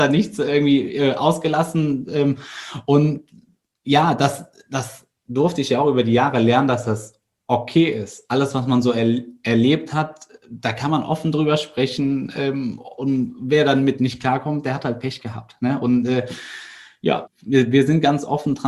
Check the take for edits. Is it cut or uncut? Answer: cut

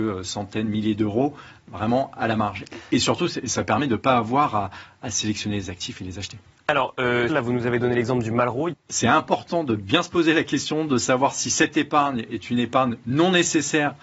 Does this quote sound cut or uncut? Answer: cut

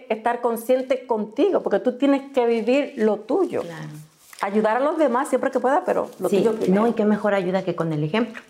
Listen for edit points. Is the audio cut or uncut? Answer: uncut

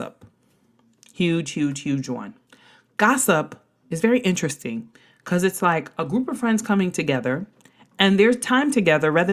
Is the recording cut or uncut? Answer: uncut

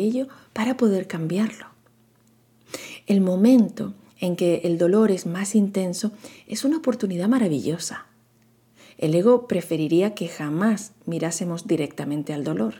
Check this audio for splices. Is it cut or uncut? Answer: uncut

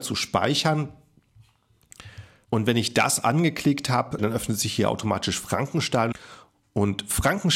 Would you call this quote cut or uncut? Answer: cut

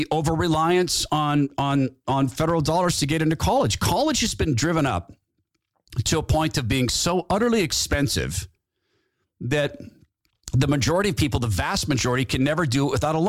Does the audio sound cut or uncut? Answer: uncut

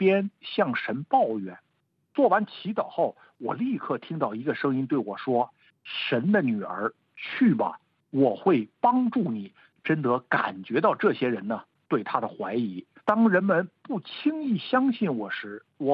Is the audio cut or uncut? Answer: cut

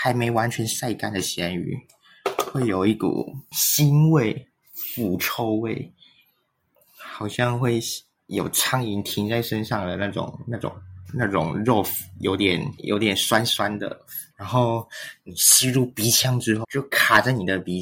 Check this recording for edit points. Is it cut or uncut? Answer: cut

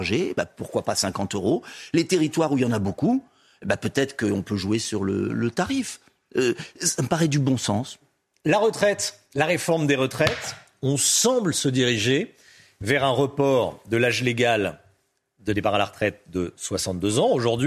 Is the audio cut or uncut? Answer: uncut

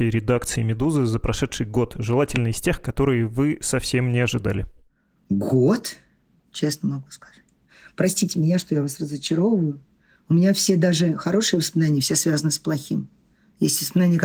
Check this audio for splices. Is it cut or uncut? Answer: cut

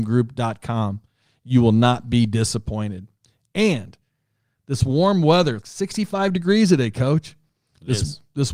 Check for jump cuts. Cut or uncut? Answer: cut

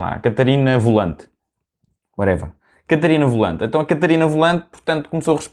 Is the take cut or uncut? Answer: uncut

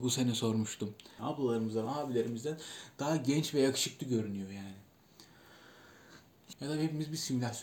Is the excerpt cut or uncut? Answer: cut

